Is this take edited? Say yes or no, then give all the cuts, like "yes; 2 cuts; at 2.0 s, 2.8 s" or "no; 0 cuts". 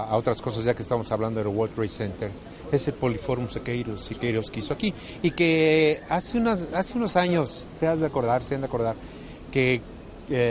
no; 0 cuts